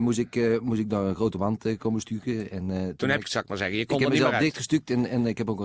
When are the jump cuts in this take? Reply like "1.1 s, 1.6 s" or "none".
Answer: 3.2 s